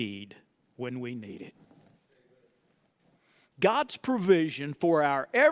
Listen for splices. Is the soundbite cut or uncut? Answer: uncut